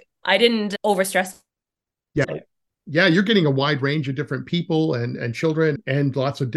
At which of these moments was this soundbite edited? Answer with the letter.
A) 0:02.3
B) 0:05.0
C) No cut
A